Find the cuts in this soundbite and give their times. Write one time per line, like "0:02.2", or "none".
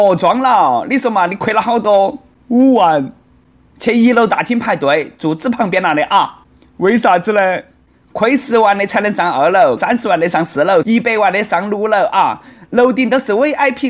0:09.8
0:10.8